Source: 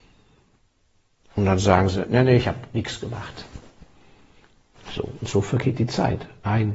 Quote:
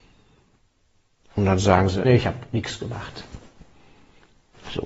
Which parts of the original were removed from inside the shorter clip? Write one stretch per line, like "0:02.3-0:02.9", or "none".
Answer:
0:02.0-0:02.3